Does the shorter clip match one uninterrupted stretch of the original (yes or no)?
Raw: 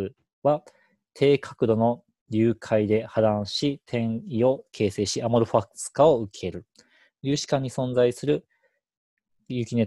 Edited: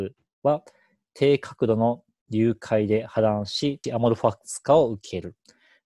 no